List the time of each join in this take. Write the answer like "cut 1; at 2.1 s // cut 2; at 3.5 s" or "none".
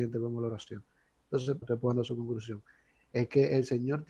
cut 1; at 1.6 s

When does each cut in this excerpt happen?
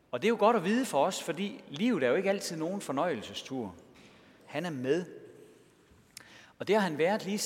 cut 1; at 4.4 s

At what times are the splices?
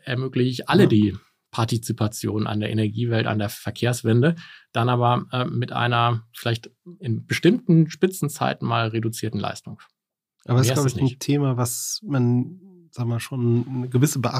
none

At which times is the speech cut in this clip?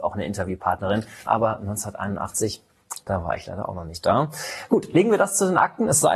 cut 1; at 1.3 s

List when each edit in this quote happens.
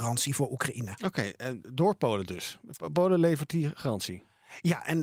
none

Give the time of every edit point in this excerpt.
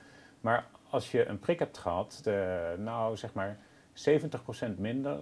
cut 1; at 2.2 s

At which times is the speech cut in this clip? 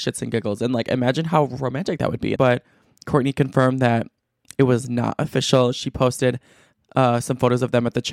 cut 1; at 2.4 s

